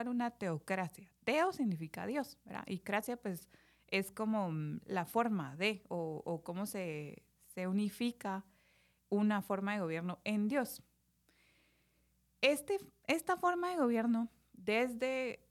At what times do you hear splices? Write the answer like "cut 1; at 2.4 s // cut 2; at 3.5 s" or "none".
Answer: none